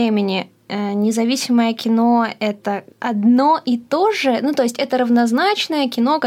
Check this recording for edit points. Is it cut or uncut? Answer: cut